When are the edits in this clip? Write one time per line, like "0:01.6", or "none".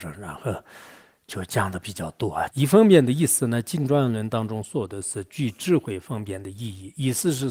0:02.5